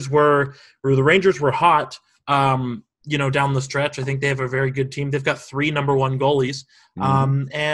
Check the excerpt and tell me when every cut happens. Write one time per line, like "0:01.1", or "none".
none